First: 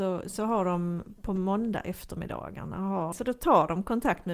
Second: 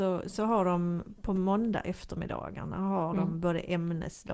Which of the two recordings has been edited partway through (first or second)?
first